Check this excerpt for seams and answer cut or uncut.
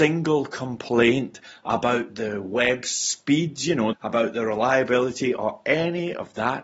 cut